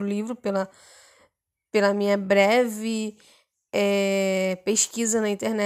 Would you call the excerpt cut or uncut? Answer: uncut